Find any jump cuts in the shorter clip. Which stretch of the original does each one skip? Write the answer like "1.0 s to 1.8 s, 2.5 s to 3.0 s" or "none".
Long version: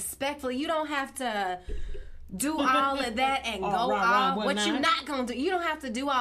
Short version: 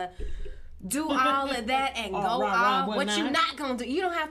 none